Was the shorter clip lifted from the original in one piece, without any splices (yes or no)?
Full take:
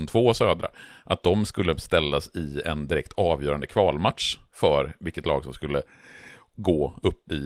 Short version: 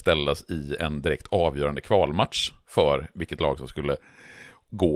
yes